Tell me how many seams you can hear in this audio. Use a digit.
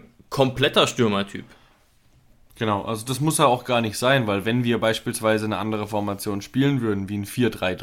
0